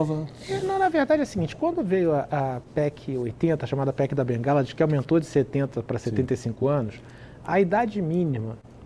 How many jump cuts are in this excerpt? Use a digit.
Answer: 0